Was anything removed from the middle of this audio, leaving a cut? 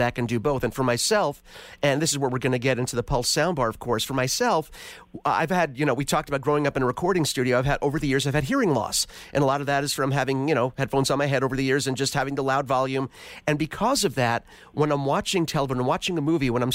no; 0 cuts

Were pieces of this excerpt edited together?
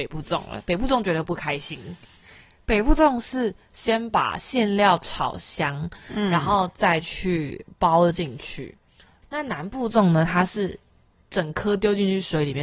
yes; 1 cut; at 9.2 s

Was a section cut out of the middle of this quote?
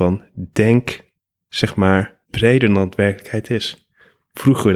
yes; 1 cut; at 2.2 s

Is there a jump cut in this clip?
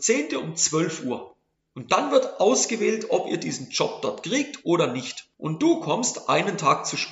yes; 2 cuts; at 1.5 s, 5.3 s

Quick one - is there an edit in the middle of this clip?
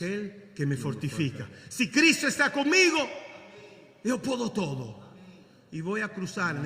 no; 0 cuts

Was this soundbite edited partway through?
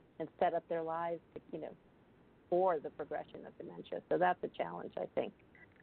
no; 0 cuts

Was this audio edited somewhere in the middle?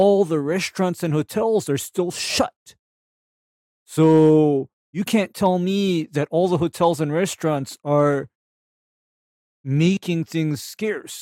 no; 0 cuts

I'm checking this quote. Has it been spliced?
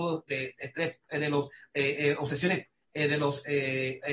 no; 0 cuts

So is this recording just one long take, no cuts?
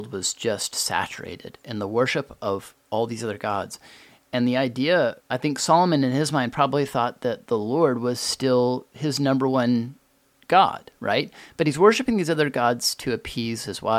no; 1 cut; at 5.2 s

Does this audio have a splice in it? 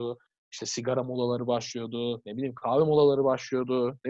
no; 0 cuts

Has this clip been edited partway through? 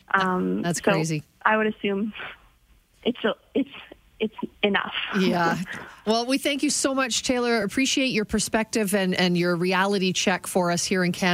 no; 0 cuts

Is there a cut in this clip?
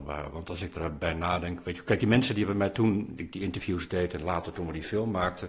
no; 0 cuts

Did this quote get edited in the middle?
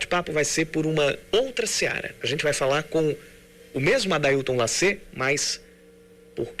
no; 0 cuts

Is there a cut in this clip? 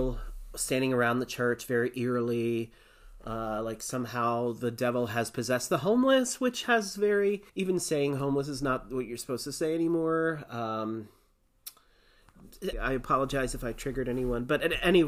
yes; 2 cuts; at 7.5 s, 12.7 s

